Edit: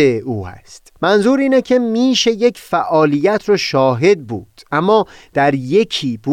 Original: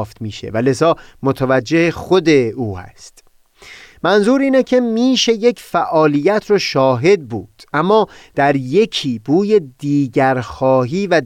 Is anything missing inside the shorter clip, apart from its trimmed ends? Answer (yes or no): yes